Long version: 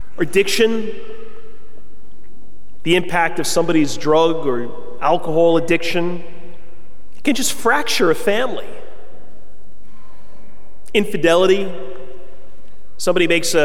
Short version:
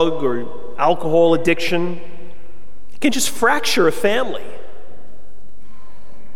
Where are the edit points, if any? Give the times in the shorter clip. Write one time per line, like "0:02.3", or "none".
none